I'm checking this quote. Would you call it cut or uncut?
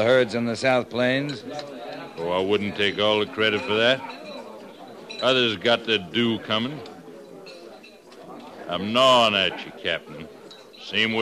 uncut